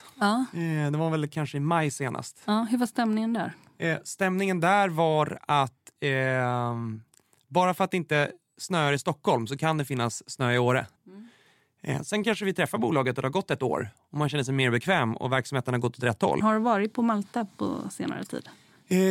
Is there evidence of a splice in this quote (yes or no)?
yes